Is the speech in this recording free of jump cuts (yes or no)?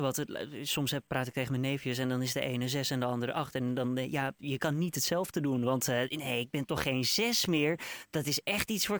yes